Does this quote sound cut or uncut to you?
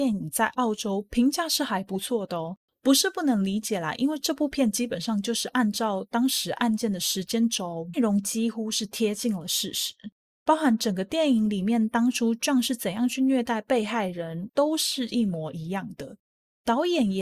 cut